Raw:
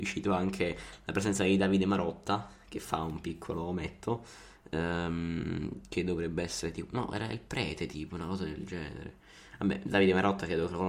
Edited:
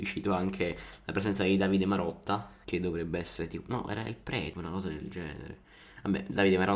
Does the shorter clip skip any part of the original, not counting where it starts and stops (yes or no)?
yes